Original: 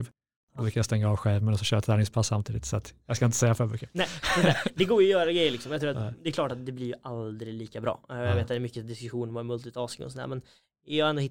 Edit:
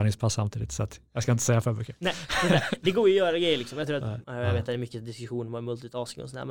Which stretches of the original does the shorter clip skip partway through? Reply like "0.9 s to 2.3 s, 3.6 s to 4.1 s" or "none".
6.2 s to 8.1 s